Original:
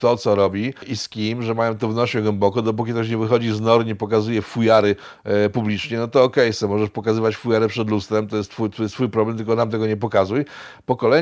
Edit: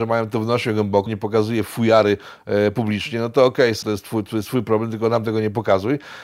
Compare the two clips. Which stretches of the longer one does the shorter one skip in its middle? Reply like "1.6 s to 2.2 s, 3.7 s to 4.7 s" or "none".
2.5 s to 3.8 s, 6.6 s to 8.3 s